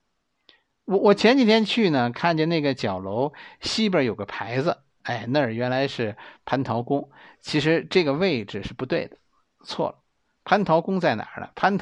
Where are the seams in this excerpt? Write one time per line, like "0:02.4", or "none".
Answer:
0:05.0